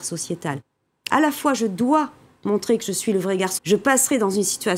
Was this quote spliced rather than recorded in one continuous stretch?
yes; 2 cuts; at 1.1 s, 3.6 s

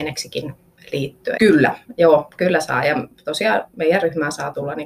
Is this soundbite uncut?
no; 1 cut; at 1.4 s

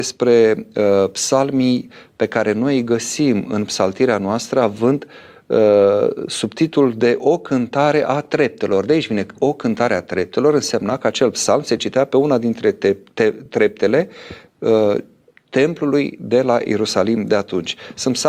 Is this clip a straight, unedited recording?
yes; 0 cuts

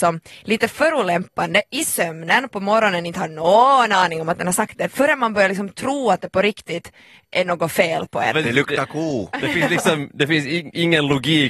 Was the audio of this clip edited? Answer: yes; 1 cut; at 8.3 s

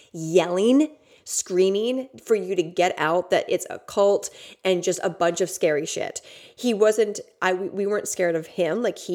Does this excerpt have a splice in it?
no; 0 cuts

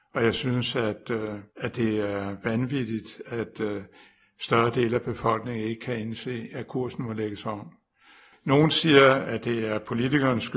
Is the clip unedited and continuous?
no; 1 cut; at 1.5 s

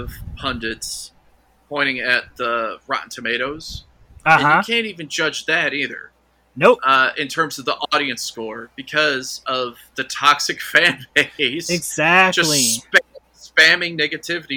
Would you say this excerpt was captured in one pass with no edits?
yes; 0 cuts

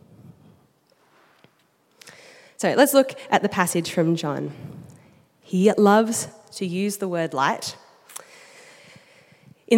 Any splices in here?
no; 0 cuts

